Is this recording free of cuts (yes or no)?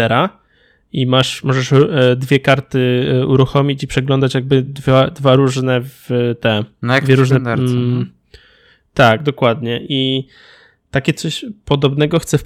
yes